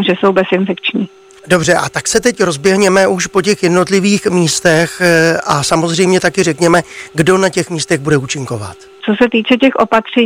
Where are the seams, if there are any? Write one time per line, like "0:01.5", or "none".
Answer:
0:09.0